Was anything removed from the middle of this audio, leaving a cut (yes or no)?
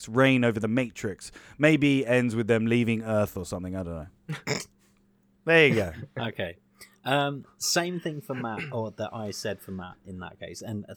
no